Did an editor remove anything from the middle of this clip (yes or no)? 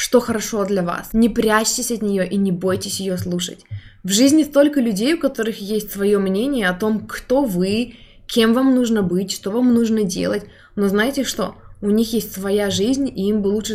no